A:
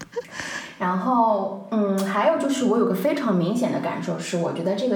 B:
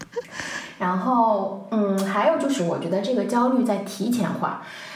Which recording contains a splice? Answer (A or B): B